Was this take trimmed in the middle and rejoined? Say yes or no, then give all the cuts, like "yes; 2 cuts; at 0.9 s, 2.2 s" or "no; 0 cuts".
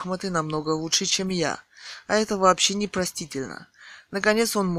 no; 0 cuts